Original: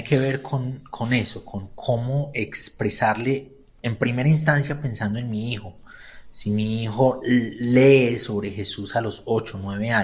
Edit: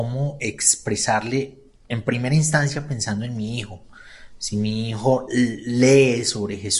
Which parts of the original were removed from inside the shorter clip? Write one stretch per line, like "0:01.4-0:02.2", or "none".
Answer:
none